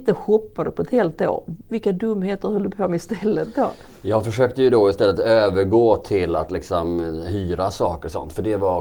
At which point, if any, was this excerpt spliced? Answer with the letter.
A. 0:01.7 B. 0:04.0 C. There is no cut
A